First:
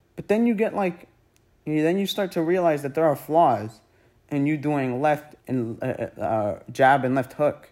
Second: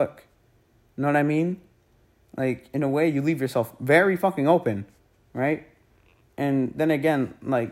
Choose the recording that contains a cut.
first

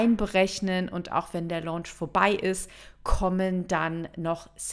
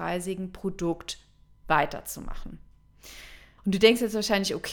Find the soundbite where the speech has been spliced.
second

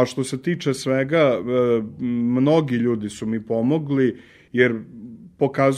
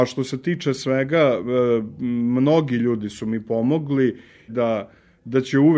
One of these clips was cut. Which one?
second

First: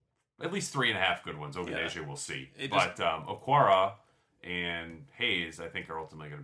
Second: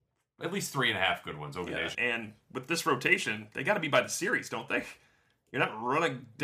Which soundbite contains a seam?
second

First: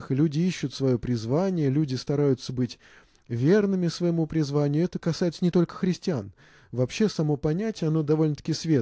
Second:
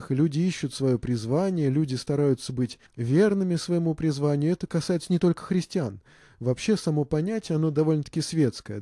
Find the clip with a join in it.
second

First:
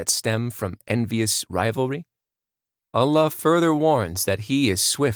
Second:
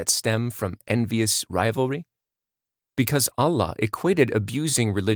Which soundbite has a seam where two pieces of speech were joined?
first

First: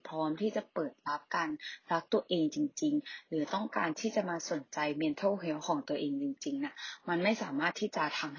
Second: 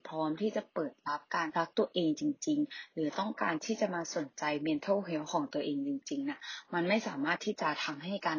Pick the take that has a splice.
second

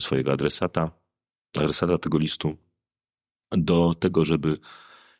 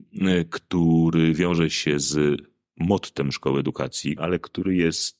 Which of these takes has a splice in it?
second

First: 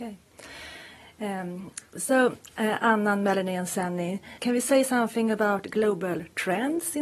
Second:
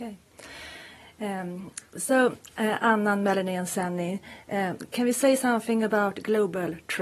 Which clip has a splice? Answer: first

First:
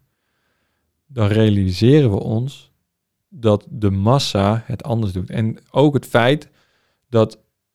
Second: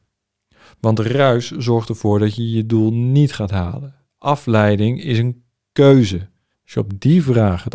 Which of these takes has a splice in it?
second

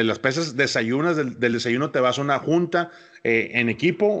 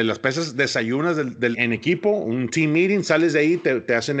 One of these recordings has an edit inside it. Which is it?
second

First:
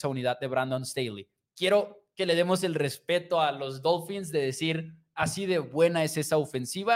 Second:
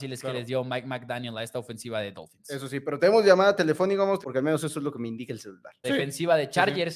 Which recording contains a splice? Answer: second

